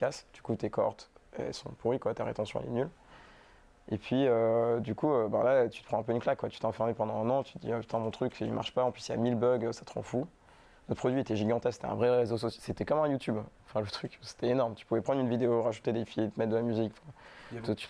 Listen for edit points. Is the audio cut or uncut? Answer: uncut